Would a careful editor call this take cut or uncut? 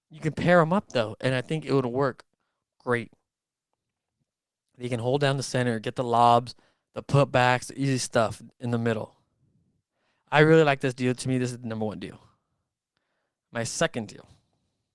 uncut